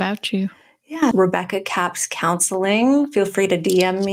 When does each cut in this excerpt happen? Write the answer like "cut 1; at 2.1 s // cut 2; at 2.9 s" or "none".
cut 1; at 1.1 s